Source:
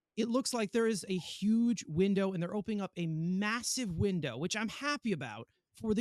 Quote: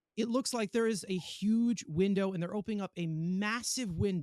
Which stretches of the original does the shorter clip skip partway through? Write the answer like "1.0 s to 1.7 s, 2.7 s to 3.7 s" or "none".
none